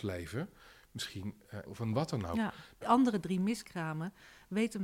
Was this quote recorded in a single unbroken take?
no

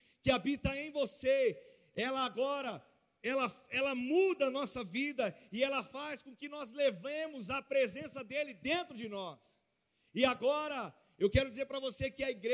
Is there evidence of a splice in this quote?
no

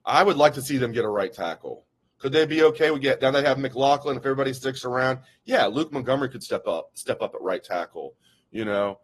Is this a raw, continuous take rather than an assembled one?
yes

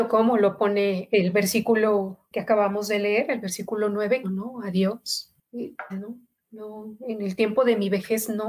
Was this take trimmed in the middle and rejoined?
yes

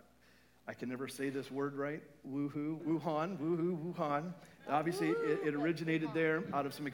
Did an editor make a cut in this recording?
yes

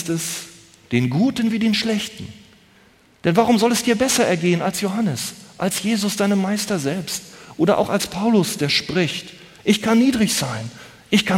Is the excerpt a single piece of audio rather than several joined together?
yes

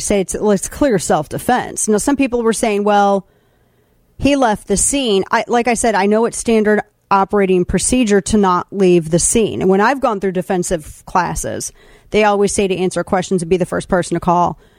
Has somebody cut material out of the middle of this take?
no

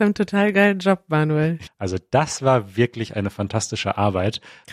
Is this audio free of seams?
no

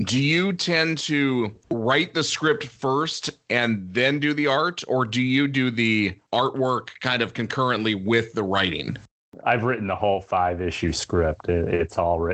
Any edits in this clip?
no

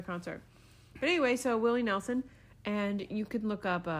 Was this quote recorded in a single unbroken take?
yes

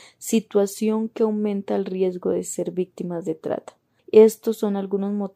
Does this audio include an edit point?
yes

